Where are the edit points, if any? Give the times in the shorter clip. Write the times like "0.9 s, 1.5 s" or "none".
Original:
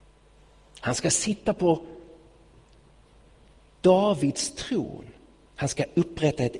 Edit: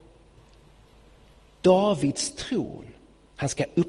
none